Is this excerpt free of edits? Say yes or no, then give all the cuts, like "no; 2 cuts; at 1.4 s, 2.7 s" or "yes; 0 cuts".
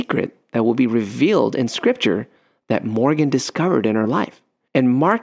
yes; 0 cuts